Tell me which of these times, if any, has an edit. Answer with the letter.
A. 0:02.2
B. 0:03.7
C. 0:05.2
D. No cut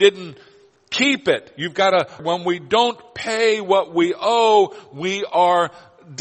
A